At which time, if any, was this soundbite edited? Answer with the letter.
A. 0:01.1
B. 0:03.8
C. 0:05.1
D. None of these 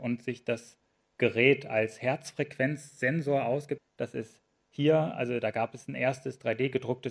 B